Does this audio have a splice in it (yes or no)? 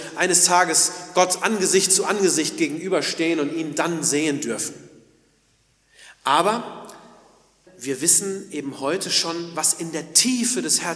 yes